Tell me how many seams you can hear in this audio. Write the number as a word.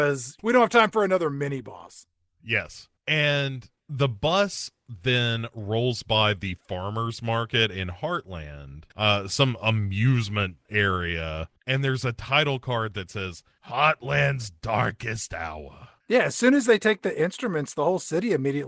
one